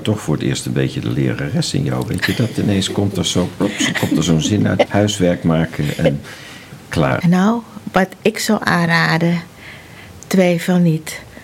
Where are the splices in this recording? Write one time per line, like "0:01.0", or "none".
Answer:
0:04.9
0:07.2